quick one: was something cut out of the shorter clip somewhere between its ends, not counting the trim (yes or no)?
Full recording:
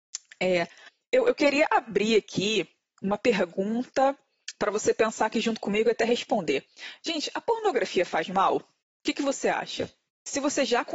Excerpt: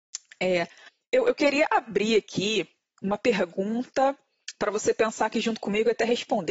no